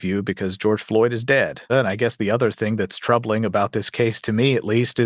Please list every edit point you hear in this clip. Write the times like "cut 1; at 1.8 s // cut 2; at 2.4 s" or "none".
cut 1; at 1.7 s